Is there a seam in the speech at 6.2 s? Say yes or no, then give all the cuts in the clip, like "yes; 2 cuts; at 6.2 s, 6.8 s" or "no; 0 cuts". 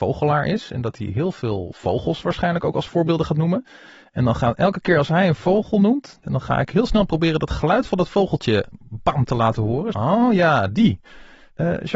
yes; 2 cuts; at 6.2 s, 9.9 s